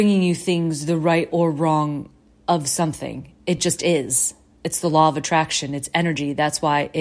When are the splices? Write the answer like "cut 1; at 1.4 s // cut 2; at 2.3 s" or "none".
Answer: none

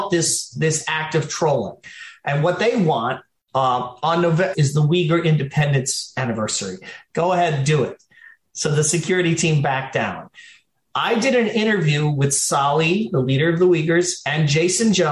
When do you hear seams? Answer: cut 1; at 4.5 s // cut 2; at 7.1 s

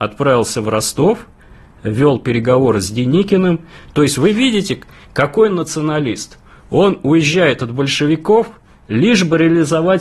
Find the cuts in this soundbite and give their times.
none

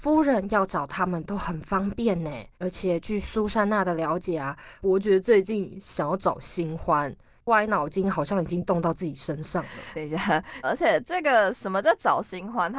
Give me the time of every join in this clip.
cut 1; at 2.5 s // cut 2; at 10.6 s

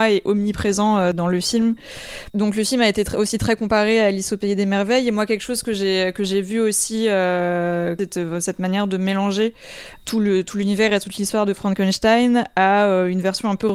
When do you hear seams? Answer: cut 1; at 2.3 s

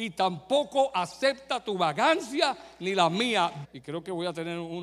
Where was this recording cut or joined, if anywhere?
cut 1; at 3.6 s

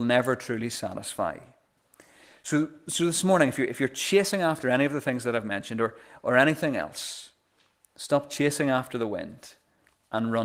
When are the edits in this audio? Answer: none

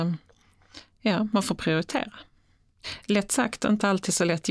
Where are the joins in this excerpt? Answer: none

